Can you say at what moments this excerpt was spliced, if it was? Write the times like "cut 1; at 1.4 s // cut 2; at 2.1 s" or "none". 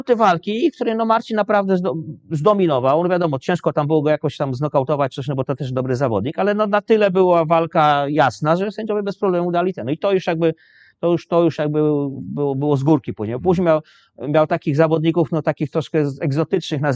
none